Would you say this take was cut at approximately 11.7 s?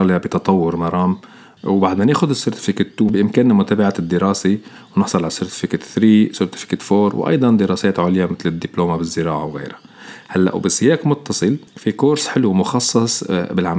yes; 1 cut; at 11.7 s

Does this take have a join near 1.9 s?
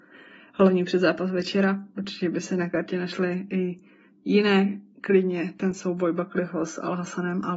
no; 0 cuts

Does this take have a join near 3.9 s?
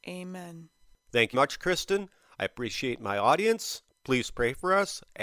no; 1 cut; at 1.3 s

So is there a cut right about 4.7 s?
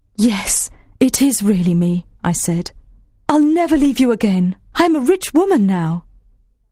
yes; 2 cuts; at 3.3 s, 4.7 s

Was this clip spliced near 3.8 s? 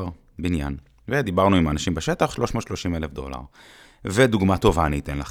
yes; 1 cut; at 3.8 s

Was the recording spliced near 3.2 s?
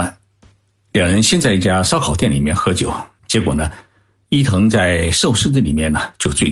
yes; 1 cut; at 3.2 s

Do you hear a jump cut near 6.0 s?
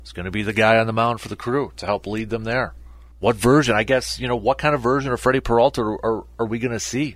no; 1 cut; at 3.1 s

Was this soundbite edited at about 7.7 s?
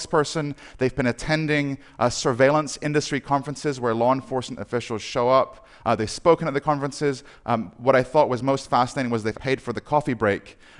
no; 1 cut; at 9.3 s

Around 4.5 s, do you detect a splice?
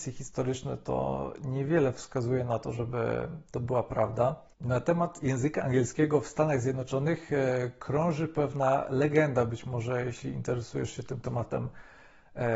yes; 1 cut; at 4.5 s

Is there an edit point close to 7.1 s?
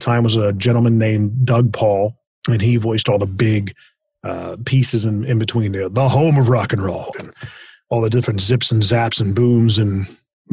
yes; 1 cut; at 7.1 s

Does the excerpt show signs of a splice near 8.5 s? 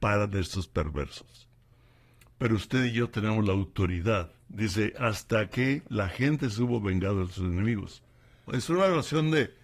yes; 2 cuts; at 4.4 s, 8.5 s

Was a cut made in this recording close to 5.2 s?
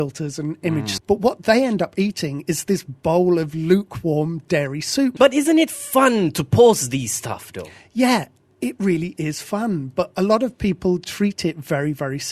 yes; 2 cuts; at 1.0 s, 5.2 s

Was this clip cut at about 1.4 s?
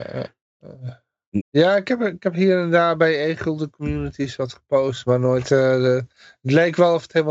yes; 1 cut; at 1.4 s

